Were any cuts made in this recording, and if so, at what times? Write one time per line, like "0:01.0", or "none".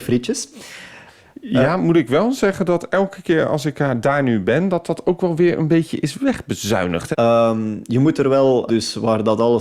0:07.1
0:08.7